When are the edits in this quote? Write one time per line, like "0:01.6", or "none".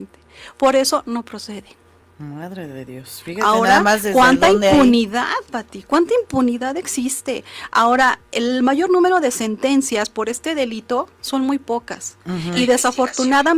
none